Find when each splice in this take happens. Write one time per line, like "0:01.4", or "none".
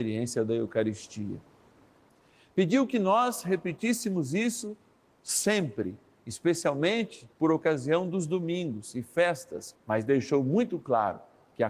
0:07.3
0:09.7